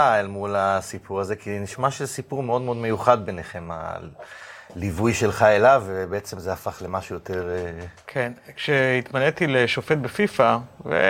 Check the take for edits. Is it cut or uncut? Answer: uncut